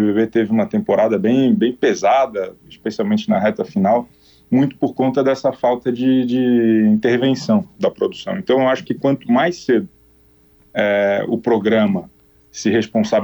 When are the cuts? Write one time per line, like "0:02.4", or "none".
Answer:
none